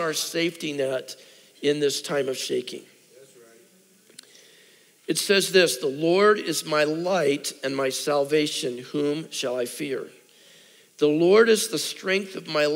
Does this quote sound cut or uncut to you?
uncut